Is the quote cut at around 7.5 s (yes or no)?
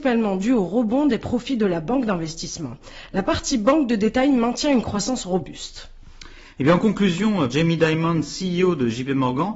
yes